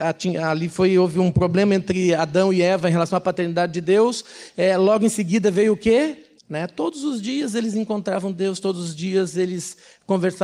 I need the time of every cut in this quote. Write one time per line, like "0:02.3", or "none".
0:06.4